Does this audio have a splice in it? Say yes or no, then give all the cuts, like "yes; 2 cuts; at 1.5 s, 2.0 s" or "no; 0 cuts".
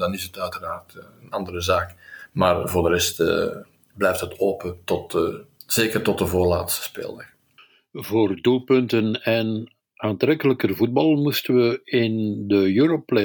no; 0 cuts